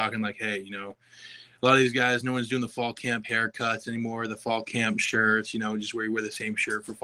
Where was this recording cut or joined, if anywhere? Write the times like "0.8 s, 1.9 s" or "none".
none